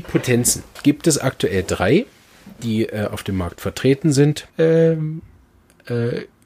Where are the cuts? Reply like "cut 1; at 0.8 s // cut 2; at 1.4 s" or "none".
cut 1; at 4.5 s